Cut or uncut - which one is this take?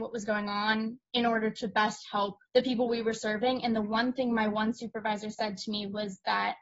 cut